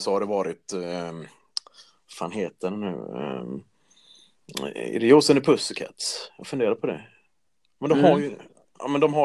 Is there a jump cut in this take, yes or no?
no